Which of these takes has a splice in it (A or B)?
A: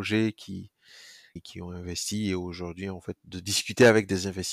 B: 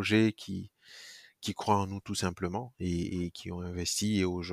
A